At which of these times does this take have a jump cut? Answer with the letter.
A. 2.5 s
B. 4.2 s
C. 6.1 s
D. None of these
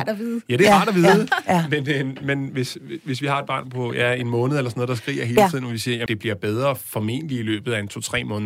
C